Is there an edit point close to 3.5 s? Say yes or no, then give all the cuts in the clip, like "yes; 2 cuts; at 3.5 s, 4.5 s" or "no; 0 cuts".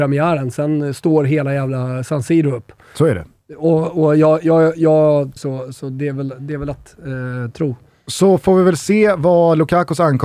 no; 1 cut; at 5.4 s